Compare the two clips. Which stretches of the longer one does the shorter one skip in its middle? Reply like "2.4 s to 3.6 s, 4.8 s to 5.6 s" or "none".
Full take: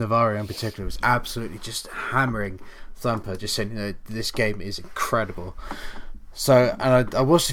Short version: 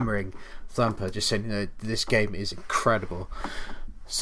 none